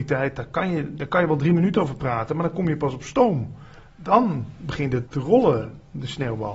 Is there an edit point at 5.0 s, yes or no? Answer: yes